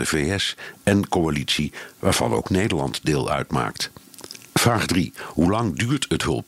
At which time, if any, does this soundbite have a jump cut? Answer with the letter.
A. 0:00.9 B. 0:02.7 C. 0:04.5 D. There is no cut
C